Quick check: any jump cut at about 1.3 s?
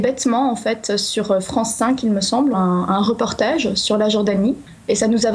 no; 1 cut; at 2.5 s

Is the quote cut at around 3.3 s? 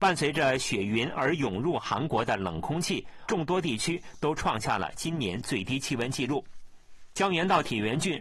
yes; 1 cut; at 3.3 s

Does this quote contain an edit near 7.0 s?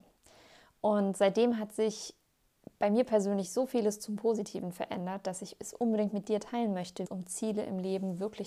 yes; 1 cut; at 7.0 s

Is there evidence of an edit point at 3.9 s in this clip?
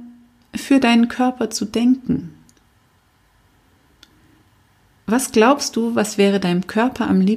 no; 0 cuts

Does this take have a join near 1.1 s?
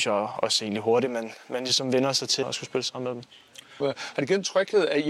no; 2 cuts; at 2.4 s, 3.8 s

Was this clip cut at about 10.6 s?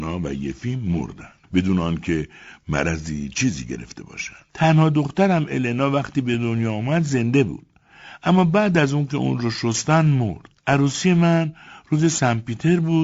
yes; 3 cuts; at 1.4 s, 4.5 s, 10.6 s

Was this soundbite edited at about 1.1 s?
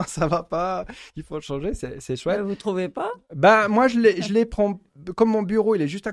no; 0 cuts

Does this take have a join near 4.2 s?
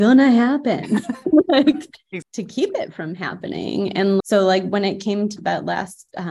yes; 3 cuts; at 2.2 s, 4.2 s, 5.4 s

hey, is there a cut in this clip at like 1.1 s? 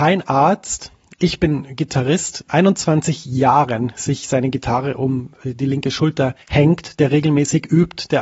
no; 2 cuts; at 2.5 s, 6.4 s

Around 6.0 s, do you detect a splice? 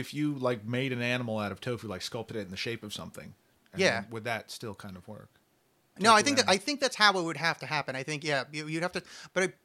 yes; 1 cut; at 6.0 s

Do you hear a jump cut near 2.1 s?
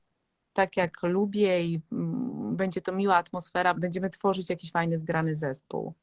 no; 1 cut; at 3.7 s

